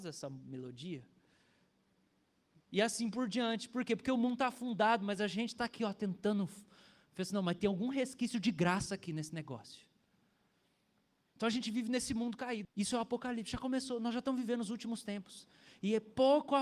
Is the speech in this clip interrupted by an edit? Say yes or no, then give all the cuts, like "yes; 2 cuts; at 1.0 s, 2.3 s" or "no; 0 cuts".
yes; 1 cut; at 12.6 s